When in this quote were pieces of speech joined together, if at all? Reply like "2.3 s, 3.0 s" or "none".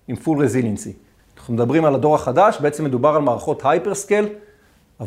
1.2 s